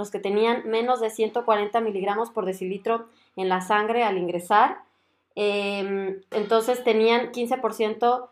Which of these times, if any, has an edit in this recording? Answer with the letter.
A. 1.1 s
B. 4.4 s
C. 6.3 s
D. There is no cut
C